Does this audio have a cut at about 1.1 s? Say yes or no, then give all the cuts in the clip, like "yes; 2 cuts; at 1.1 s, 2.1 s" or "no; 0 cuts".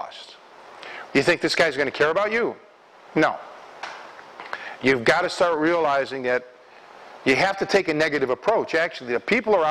yes; 1 cut; at 1.1 s